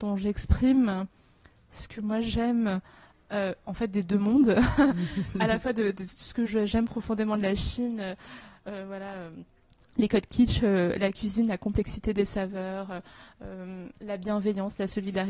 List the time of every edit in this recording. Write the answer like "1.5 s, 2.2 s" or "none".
none